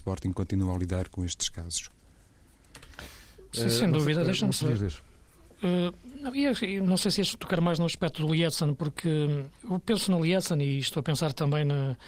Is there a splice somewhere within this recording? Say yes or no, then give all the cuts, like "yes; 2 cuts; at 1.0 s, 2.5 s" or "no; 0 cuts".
yes; 2 cuts; at 4.6 s, 9.6 s